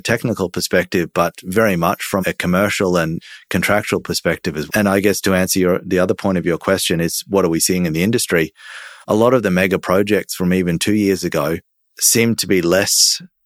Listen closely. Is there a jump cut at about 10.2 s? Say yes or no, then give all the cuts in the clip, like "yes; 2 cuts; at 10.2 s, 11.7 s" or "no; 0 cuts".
no; 3 cuts; at 2.2 s, 4.7 s, 9.0 s